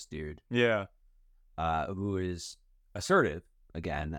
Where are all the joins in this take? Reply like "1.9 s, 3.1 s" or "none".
none

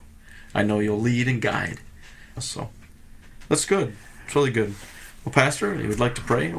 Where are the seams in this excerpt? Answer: 2.4 s

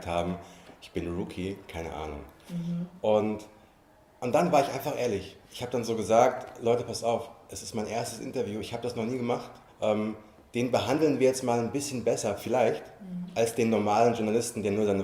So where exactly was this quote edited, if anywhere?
9.7 s

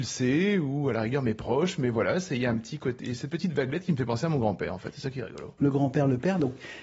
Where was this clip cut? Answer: 5.6 s

